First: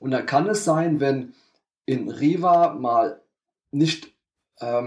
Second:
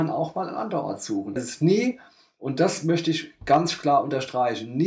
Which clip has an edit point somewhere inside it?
second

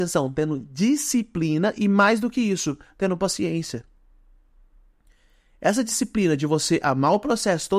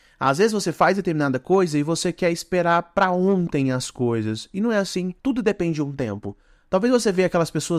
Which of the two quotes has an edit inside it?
second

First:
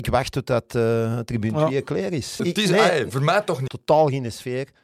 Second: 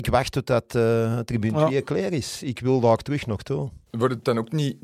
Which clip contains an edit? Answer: first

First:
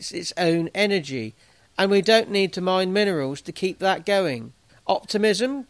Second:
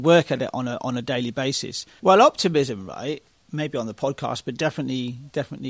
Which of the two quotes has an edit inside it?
second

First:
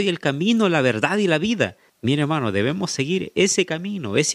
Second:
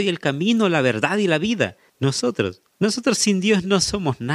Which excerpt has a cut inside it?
second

